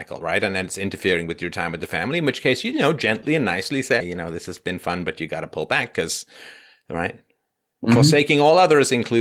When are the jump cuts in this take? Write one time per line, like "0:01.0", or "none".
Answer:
0:04.0